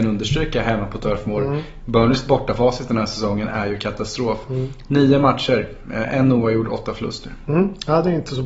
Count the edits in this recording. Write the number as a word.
zero